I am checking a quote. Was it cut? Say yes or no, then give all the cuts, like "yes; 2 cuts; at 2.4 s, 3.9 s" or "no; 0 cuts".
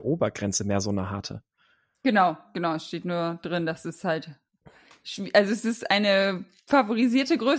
no; 0 cuts